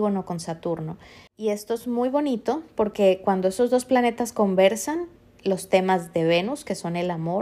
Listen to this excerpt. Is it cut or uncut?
uncut